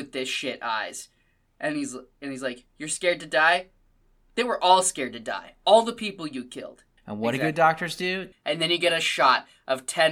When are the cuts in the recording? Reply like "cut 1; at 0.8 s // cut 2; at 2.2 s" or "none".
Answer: cut 1; at 7.0 s // cut 2; at 8.3 s